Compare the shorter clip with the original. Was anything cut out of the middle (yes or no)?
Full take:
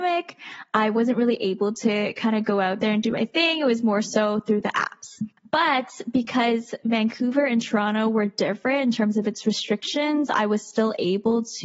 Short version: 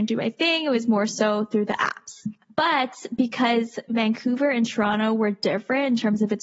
no